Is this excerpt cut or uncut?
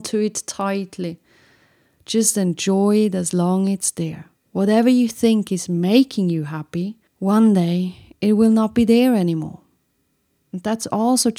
cut